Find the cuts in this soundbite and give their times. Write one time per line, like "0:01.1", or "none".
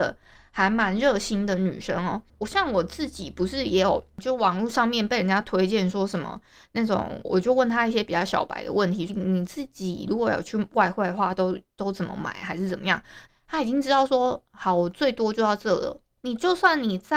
0:07.2
0:09.1
0:13.3